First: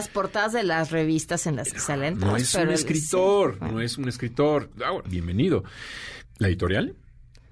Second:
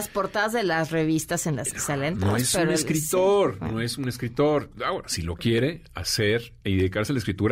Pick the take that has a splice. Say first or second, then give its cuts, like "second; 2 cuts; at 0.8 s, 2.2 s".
first; 2 cuts; at 5.0 s, 6.2 s